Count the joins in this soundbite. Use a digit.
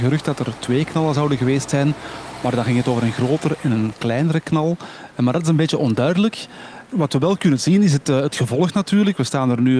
0